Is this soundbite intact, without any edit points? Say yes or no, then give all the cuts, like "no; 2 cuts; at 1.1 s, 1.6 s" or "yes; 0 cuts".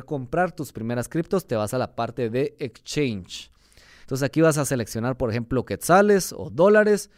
no; 1 cut; at 4.0 s